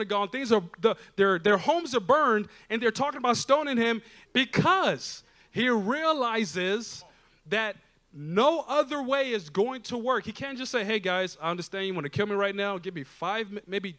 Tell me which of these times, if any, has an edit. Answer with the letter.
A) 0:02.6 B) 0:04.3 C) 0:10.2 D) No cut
B